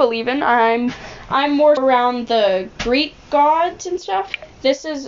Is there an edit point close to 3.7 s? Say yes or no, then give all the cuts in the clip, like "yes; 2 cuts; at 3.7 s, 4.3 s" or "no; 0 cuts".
no; 1 cut; at 1.8 s